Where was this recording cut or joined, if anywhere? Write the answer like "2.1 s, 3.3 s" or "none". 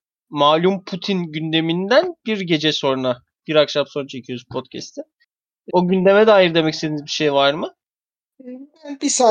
5.7 s